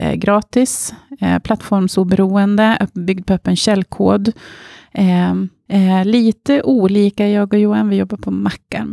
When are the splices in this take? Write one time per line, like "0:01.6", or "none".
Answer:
0:05.7